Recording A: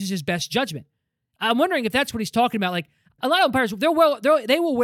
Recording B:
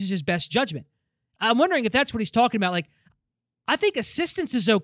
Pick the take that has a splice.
A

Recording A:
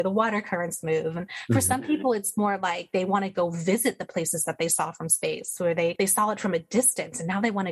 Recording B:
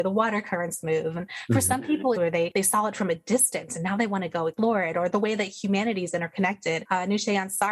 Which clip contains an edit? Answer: B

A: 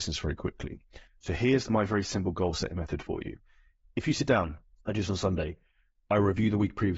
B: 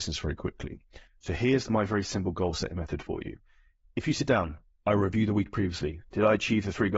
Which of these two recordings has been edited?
B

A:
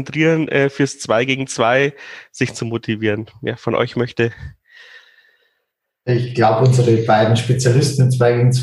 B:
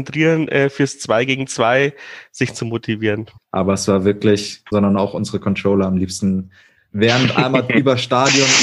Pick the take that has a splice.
B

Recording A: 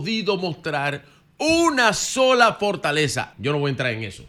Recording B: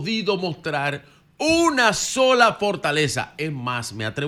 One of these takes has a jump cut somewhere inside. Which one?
A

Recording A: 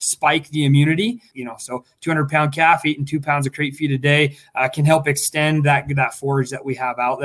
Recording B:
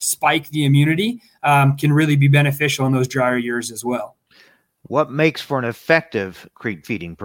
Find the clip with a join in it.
A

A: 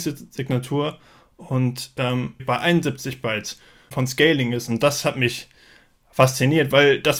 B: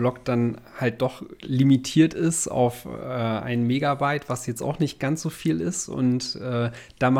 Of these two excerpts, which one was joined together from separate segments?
A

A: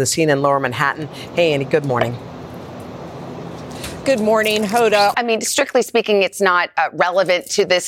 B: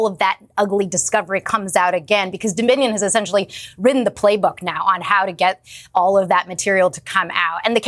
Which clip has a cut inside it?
A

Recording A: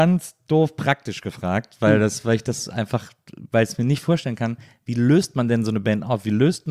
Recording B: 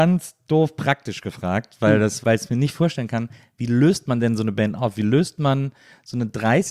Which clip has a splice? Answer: B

